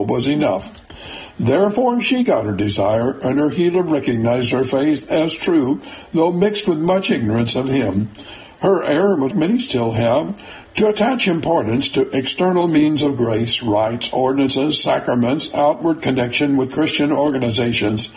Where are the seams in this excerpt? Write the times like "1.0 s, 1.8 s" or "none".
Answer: 9.3 s